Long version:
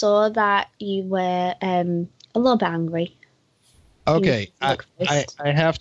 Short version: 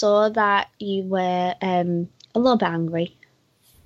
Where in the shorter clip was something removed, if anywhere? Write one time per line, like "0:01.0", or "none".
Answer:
none